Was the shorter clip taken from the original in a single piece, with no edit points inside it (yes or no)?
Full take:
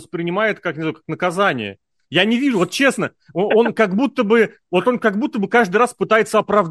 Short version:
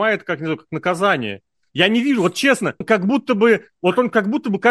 no